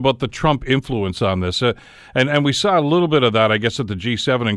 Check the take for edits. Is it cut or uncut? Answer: uncut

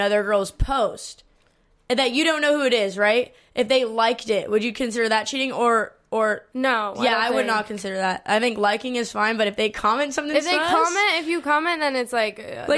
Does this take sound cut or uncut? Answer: uncut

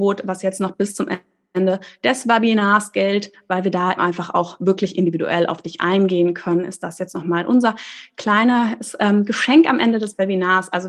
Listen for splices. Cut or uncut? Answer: cut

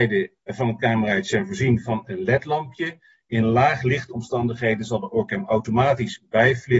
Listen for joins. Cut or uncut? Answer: uncut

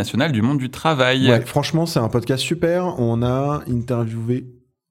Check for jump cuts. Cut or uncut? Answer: uncut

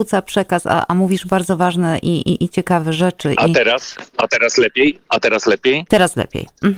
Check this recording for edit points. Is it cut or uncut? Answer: uncut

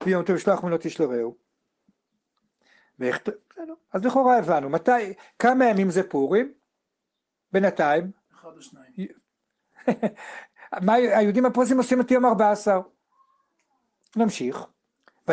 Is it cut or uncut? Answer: uncut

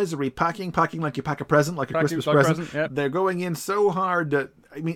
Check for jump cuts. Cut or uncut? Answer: cut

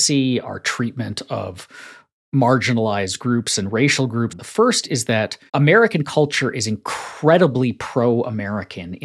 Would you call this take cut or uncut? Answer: cut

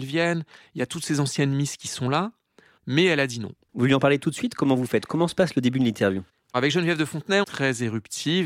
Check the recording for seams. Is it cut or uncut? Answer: cut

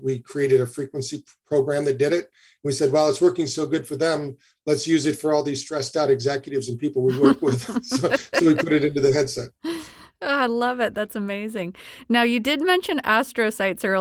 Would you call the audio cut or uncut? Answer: uncut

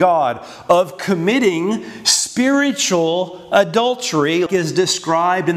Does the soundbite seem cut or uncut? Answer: cut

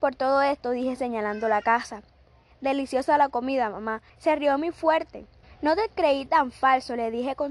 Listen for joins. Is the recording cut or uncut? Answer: cut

